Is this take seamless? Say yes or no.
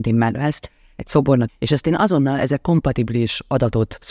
no